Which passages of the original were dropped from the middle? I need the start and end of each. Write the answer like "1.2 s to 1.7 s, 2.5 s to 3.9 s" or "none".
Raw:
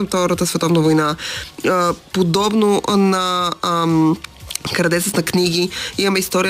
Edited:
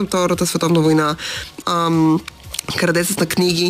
1.6 s to 3.6 s